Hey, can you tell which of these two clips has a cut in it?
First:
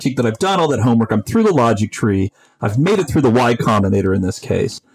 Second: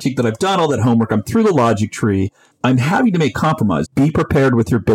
second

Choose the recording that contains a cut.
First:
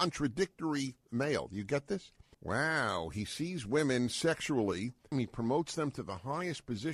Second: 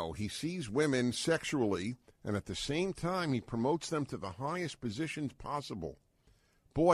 first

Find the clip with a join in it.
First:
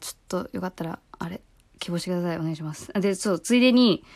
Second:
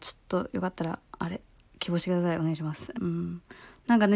second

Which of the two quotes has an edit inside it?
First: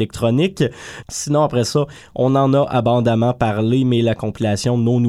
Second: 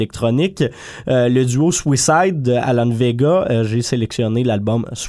first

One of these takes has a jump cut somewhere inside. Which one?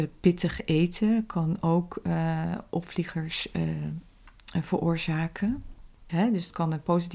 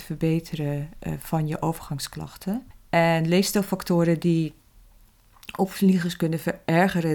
first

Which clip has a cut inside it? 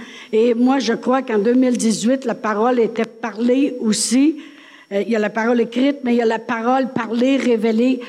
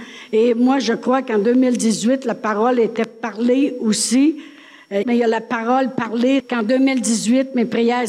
second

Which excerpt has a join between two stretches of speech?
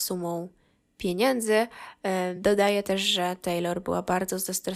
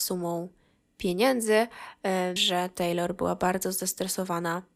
second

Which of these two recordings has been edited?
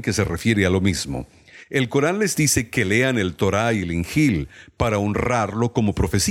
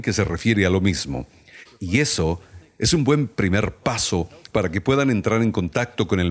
second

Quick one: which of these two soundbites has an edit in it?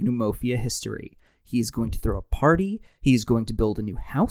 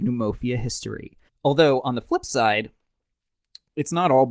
second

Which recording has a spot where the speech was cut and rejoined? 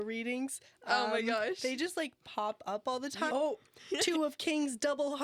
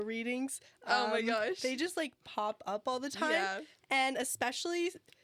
first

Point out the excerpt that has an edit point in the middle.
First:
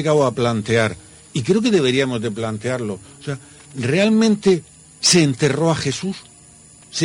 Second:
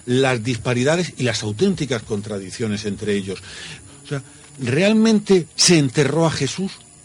second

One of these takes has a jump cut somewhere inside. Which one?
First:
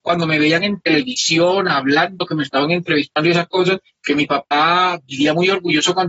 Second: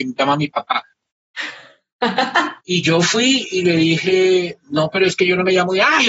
second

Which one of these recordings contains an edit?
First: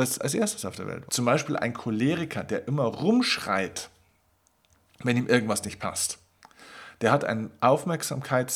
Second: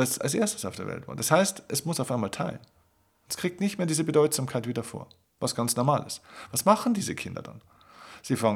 first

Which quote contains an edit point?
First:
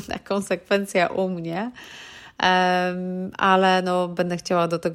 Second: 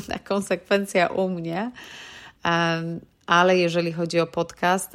second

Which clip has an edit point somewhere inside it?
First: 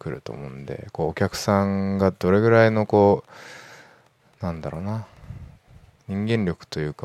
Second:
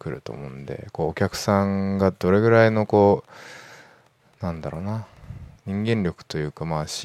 second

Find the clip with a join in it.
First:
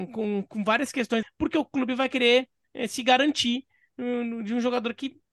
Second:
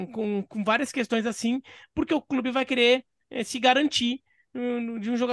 first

